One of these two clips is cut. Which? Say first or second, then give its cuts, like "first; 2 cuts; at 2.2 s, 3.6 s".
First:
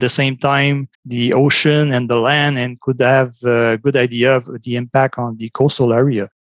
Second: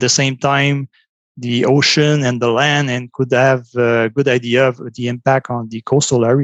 first; 1 cut; at 0.9 s